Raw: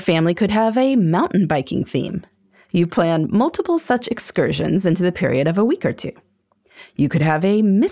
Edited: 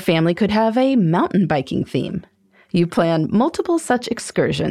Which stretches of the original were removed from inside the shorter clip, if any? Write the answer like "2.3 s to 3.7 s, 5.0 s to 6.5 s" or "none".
none